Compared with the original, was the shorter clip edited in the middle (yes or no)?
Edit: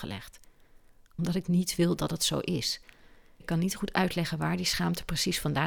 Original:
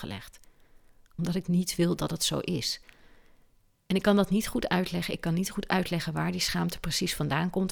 yes